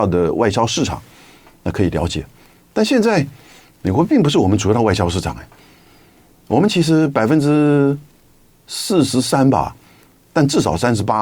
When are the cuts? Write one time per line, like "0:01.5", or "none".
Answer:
none